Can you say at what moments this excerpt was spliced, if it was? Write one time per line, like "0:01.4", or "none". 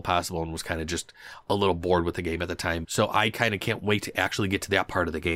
0:02.8

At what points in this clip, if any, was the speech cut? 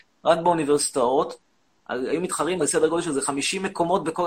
0:01.8

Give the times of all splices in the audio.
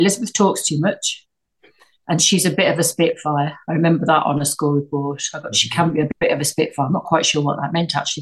none

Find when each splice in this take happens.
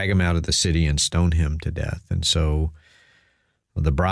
none

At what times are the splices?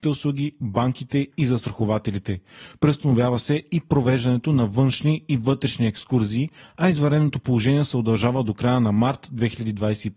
none

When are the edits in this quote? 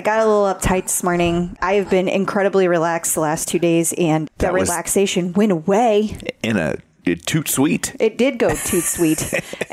0:04.3

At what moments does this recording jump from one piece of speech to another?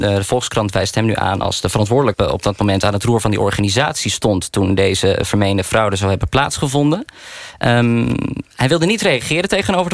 0:02.1

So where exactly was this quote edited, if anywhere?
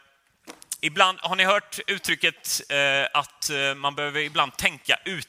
none

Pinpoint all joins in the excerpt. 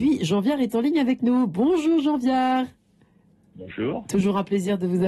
none

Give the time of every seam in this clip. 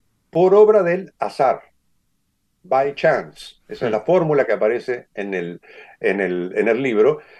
none

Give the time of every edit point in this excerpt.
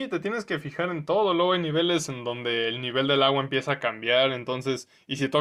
none

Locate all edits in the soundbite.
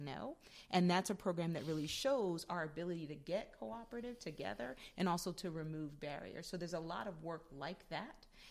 none

